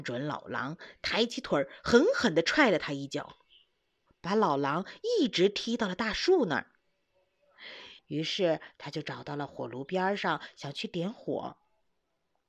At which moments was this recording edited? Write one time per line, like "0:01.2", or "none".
0:08.0